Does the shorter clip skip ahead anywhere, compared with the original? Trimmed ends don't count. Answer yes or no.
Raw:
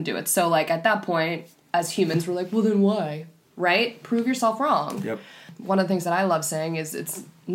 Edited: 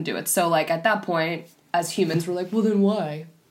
no